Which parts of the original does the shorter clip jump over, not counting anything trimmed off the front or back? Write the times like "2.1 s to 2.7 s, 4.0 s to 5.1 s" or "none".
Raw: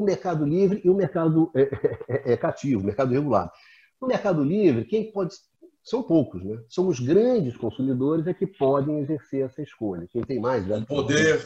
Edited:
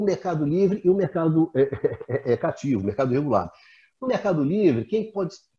none